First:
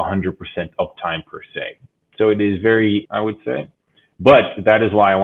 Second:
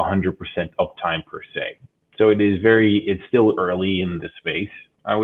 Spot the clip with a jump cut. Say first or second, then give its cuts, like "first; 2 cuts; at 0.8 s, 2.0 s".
first; 1 cut; at 3.0 s